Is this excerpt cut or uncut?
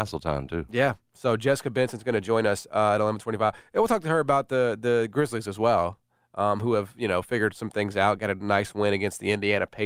uncut